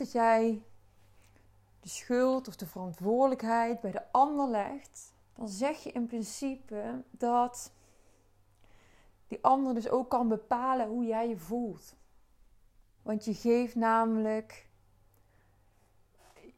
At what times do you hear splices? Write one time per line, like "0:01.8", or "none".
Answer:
0:05.2
0:13.0